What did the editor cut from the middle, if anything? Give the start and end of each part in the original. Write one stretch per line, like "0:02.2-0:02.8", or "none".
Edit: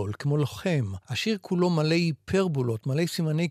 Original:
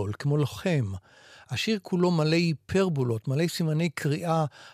0:01.0-0:01.4